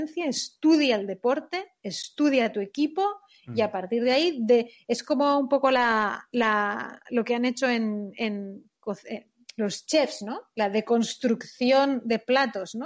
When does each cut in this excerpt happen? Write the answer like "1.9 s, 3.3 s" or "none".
none